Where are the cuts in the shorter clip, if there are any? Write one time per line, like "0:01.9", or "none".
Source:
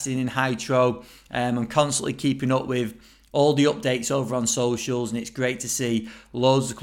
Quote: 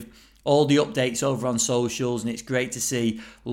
none